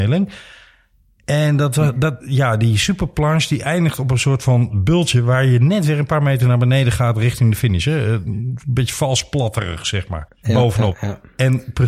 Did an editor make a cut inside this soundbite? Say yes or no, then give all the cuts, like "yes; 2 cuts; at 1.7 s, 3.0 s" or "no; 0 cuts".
yes; 2 cuts; at 2.2 s, 10.4 s